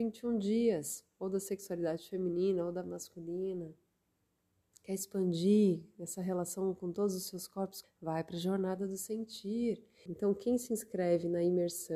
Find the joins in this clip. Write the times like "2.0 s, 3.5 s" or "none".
7.8 s, 10.1 s